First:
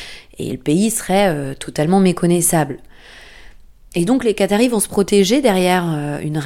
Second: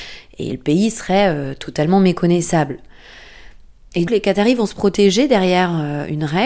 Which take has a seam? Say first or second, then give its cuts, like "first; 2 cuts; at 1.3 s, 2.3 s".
second; 1 cut; at 4.1 s